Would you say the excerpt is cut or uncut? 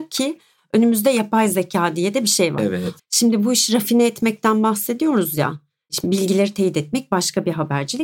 cut